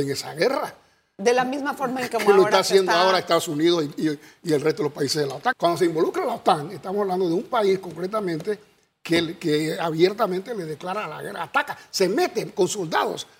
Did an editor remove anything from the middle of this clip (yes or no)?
yes